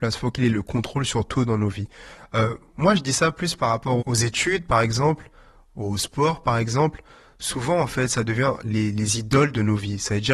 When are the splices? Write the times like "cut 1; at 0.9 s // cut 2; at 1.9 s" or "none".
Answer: cut 1; at 4.0 s // cut 2; at 5.7 s